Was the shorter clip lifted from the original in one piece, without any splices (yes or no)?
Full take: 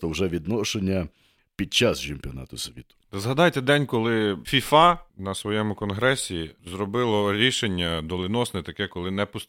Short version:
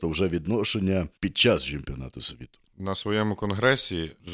no